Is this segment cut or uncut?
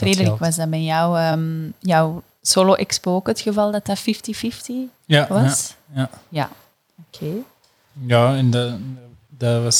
uncut